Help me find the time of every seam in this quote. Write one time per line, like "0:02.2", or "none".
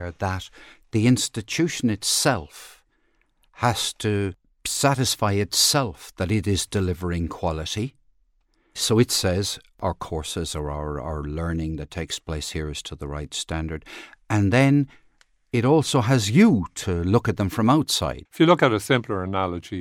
0:18.3